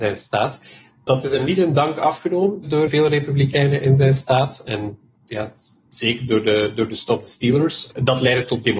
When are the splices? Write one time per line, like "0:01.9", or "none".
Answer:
0:02.9